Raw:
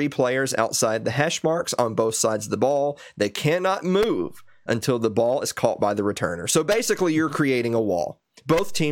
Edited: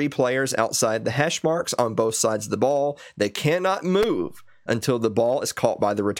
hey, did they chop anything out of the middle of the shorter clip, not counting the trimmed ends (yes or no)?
no